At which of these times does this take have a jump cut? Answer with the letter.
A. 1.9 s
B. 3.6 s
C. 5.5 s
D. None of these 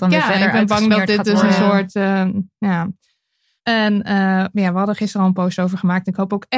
B